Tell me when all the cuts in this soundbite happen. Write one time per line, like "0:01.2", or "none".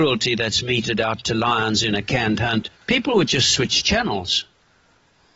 0:02.8